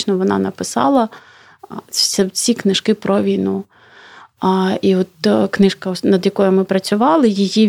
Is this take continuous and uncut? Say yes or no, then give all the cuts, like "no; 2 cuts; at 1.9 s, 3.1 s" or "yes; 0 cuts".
yes; 0 cuts